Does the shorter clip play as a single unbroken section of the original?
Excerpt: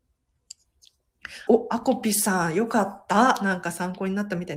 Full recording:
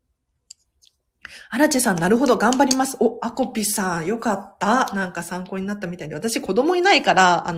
no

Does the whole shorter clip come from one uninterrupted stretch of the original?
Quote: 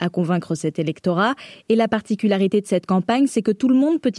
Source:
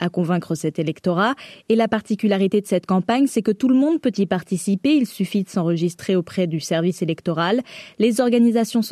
yes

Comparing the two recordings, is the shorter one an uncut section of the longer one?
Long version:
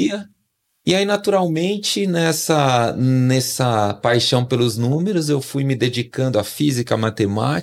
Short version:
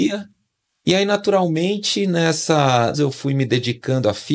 no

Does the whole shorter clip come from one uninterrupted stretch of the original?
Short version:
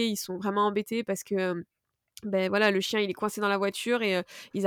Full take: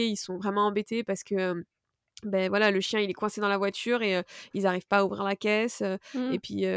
yes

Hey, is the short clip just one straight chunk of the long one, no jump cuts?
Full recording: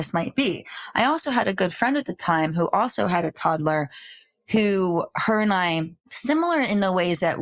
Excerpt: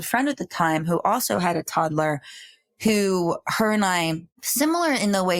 yes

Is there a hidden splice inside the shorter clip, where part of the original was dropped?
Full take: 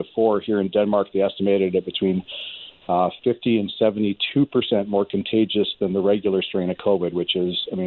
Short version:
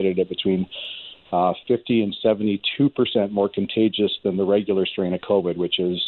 no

